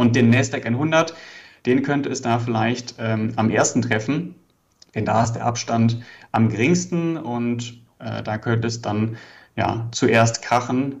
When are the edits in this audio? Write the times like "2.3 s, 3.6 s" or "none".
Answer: none